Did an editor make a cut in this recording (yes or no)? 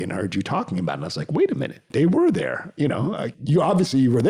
no